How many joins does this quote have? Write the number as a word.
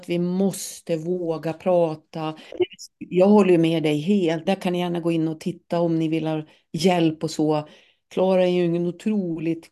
two